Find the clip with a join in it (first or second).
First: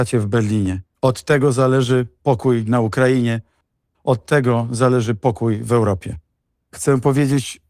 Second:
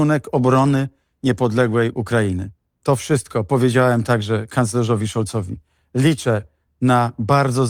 first